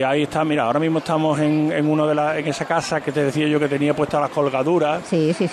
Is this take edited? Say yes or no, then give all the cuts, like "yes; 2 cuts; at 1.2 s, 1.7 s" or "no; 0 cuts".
yes; 1 cut; at 3.0 s